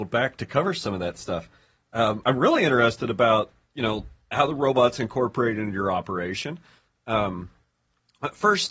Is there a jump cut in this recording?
no; 0 cuts

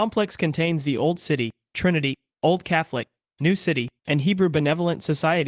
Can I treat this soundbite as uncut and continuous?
no; 2 cuts; at 2.3 s, 4.0 s

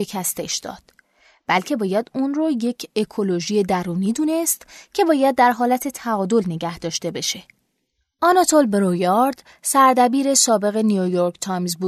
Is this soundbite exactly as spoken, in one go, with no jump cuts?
yes; 0 cuts

